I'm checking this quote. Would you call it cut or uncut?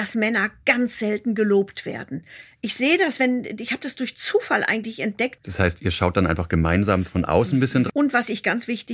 cut